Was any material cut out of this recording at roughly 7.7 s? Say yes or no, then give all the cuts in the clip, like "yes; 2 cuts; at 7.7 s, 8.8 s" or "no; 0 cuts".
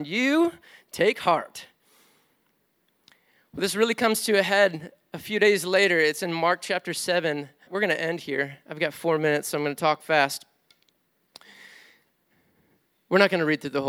yes; 1 cut; at 7.7 s